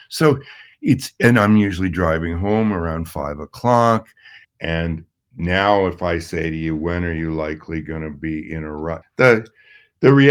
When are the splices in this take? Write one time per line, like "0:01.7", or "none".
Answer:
0:04.4
0:09.0